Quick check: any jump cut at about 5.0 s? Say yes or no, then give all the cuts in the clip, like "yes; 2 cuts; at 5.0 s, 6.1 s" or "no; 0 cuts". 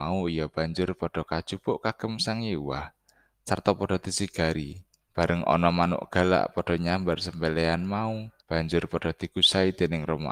yes; 2 cuts; at 5.0 s, 8.4 s